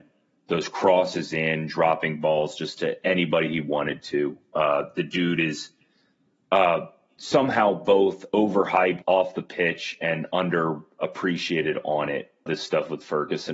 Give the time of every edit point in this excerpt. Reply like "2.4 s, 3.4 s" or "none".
9.0 s, 11.0 s, 12.5 s